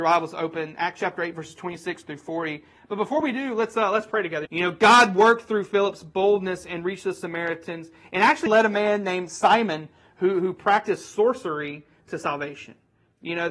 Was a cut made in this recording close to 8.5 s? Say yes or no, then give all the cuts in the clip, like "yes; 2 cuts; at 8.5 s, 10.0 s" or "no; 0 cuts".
yes; 2 cuts; at 4.4 s, 8.5 s